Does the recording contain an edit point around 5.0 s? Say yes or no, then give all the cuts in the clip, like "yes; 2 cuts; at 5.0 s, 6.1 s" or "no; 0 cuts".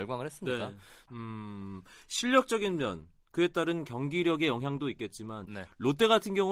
no; 1 cut; at 1.1 s